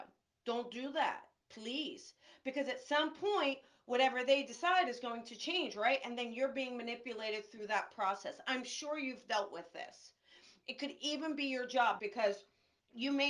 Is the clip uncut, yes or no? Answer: no